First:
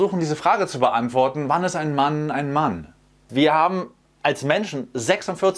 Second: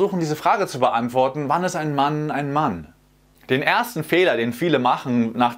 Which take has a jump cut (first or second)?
first